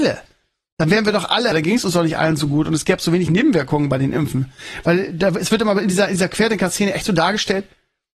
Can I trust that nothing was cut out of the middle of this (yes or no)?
no